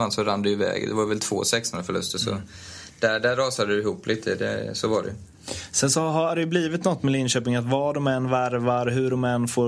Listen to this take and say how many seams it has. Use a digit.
0